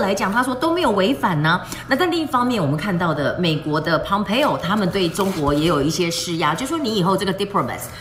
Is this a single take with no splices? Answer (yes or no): yes